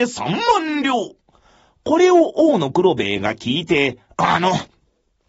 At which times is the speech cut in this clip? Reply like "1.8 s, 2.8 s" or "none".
none